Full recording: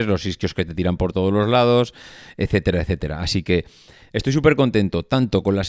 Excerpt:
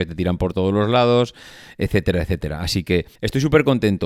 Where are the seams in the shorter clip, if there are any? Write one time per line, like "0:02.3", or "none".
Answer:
0:03.1